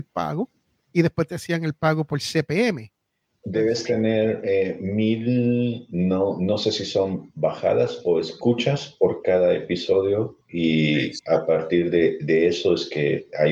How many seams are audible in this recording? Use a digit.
0